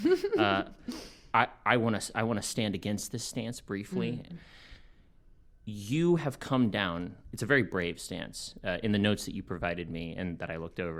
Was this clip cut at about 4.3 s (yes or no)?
yes